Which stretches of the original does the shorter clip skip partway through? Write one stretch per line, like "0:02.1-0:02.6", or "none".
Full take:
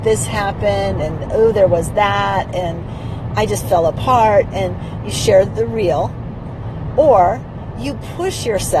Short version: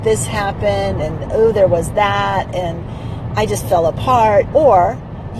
0:04.5-0:06.9